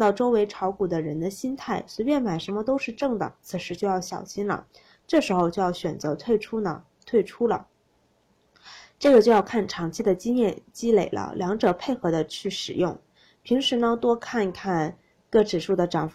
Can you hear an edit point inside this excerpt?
no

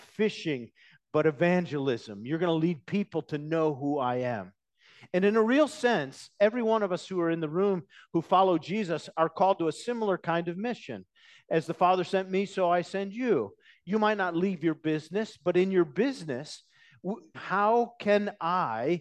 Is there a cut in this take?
yes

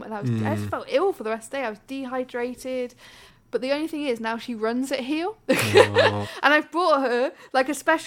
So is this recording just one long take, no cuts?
no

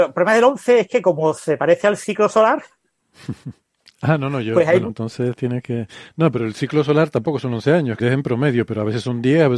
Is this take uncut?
no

